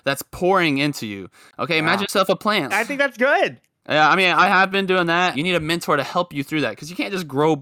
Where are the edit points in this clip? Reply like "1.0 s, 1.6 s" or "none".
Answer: 2.7 s, 5.3 s

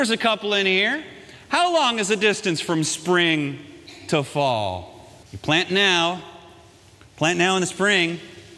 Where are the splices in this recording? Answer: 5.2 s

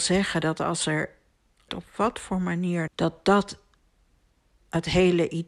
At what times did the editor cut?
1.7 s, 2.9 s

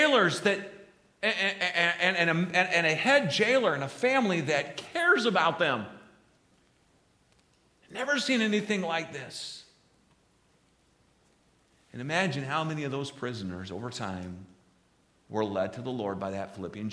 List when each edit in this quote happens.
none

